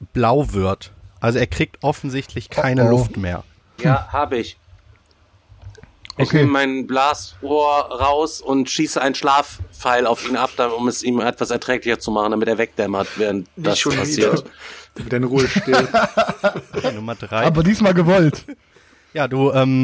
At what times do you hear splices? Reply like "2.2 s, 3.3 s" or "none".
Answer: 3.8 s